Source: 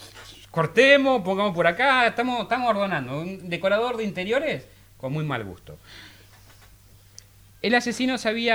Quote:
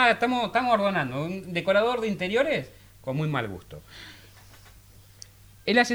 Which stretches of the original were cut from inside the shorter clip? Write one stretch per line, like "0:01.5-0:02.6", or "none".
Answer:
none